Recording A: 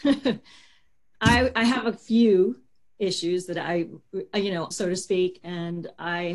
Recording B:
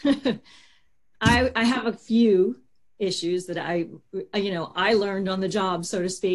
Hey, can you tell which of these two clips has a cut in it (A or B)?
A